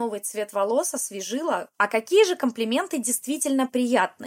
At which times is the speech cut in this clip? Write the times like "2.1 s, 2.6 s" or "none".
1.7 s